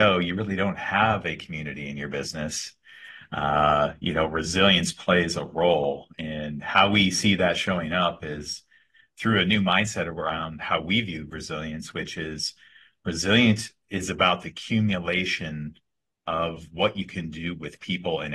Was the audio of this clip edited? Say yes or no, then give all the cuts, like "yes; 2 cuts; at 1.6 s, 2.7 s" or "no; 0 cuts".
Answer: no; 0 cuts